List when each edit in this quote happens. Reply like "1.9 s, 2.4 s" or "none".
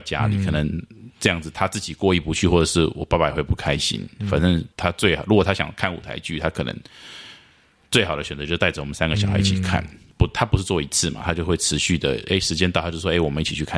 4.7 s, 10.1 s